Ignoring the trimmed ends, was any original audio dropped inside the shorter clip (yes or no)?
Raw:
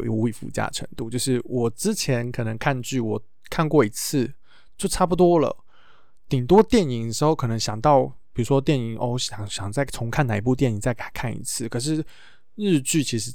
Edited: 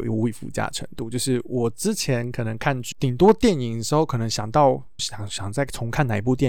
yes